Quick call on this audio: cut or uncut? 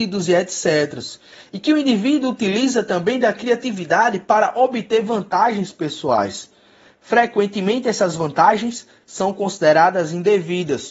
uncut